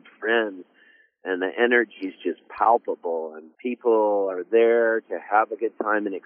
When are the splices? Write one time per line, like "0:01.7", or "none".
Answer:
0:03.5